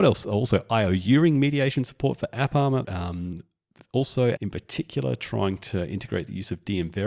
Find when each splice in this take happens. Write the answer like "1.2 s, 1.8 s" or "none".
2.8 s, 4.4 s